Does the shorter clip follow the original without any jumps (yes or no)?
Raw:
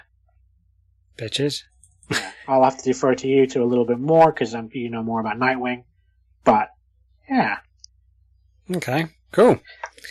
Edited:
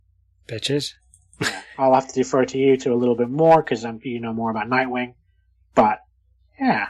yes